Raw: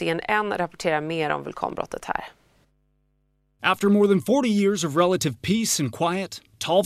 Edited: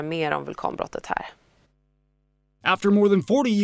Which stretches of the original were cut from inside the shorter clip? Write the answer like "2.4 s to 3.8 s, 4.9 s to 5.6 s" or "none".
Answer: none